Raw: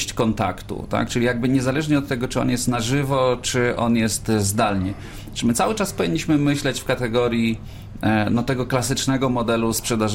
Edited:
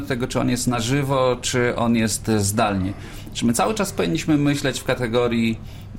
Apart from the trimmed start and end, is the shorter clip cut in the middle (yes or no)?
no